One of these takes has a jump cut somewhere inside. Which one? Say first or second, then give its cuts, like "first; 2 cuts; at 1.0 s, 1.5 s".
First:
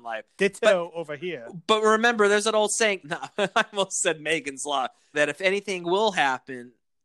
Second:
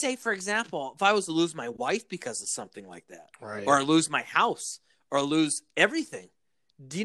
first; 2 cuts; at 3.0 s, 5.1 s